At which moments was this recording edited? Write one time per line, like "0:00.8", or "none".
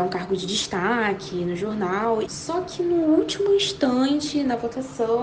0:02.2